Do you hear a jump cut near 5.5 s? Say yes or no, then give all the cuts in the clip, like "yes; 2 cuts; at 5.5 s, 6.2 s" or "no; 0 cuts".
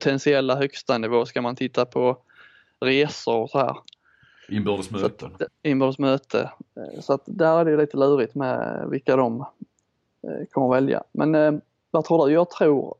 yes; 1 cut; at 5.5 s